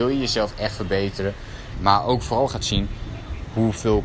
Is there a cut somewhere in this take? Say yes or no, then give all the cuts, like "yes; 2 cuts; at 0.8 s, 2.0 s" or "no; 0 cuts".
yes; 1 cut; at 1.7 s